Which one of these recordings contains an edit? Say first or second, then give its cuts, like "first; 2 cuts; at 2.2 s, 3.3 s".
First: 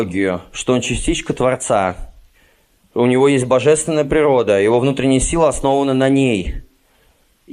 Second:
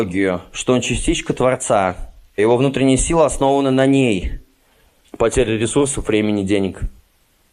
second; 2 cuts; at 2.4 s, 5.0 s